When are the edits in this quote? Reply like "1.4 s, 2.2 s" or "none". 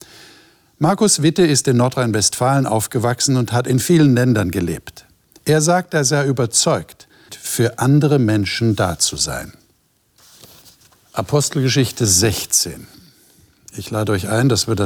7.3 s